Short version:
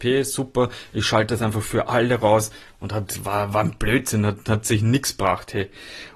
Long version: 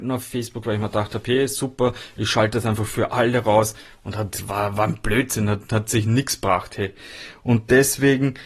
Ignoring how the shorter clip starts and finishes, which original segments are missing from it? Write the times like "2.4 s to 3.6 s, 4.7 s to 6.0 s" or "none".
none